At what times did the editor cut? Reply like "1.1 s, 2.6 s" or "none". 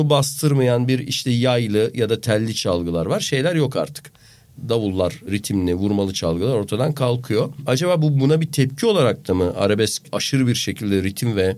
none